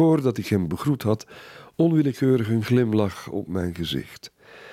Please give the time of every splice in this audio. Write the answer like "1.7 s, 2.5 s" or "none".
none